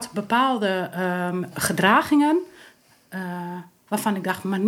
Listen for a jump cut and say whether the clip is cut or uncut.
cut